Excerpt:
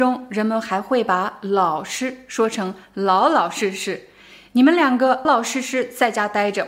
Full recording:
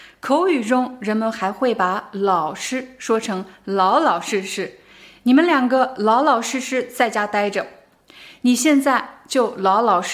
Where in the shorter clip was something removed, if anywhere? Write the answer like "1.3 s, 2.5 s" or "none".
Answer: 5.3 s